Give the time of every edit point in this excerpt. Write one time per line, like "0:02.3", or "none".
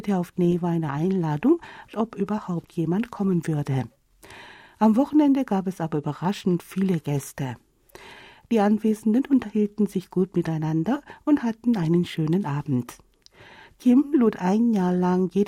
0:01.9